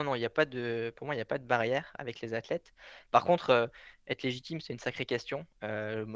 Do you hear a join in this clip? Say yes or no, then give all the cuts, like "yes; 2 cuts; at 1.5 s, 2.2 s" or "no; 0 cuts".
no; 0 cuts